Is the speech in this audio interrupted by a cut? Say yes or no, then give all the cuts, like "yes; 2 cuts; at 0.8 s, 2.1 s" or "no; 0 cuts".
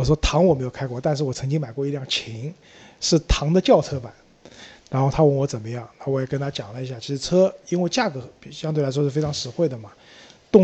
no; 0 cuts